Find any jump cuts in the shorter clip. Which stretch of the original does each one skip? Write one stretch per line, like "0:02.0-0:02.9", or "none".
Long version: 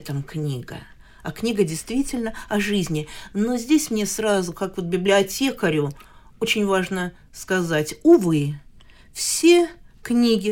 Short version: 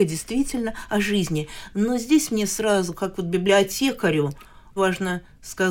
0:06.4-0:06.7